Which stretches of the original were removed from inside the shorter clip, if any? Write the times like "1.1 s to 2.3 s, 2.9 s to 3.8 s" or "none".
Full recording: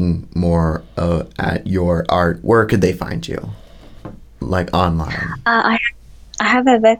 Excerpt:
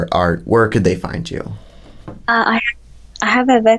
4.2 s to 5.4 s